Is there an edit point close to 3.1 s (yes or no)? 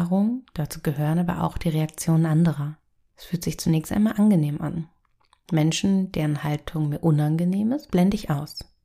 yes